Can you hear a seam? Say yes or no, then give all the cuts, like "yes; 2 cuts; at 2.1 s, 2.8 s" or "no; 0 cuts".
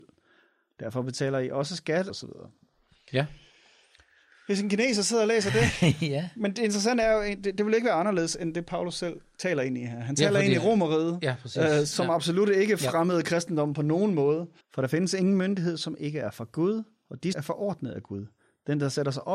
yes; 3 cuts; at 2.1 s, 14.6 s, 17.3 s